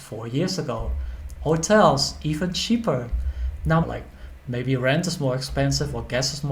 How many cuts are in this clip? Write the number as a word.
two